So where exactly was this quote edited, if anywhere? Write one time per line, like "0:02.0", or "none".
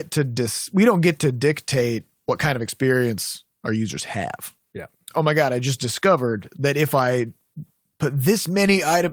0:05.1